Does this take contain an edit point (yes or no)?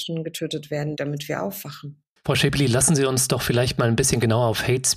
yes